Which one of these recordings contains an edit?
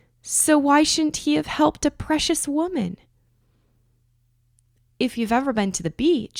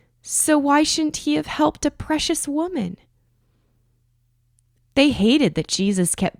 second; 1 cut; at 4.8 s

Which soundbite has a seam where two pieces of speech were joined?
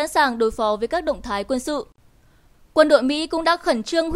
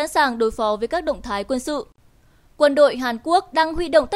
first; 1 cut; at 2.5 s

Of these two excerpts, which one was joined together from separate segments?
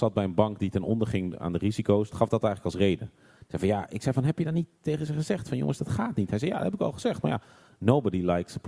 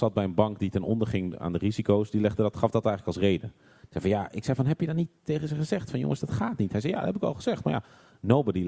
first; 1 cut; at 2.1 s

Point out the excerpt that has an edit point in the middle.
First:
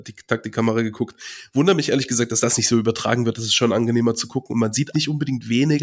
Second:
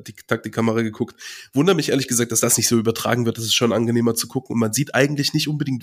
first; 1 cut; at 4.9 s

